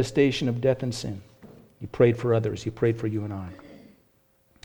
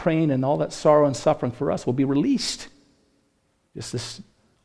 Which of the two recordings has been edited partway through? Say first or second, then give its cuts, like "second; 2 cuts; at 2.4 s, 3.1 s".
second; 1 cut; at 3.7 s